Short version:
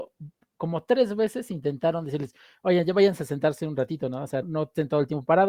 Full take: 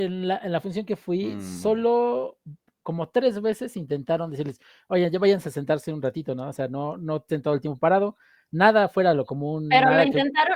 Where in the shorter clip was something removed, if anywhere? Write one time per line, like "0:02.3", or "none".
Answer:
0:04.4